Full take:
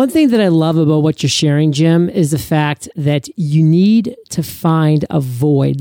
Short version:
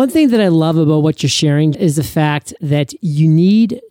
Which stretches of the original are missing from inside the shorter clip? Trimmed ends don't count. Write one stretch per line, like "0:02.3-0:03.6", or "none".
0:01.7-0:02.1